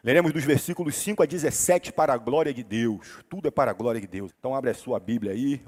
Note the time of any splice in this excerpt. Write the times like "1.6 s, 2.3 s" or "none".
4.3 s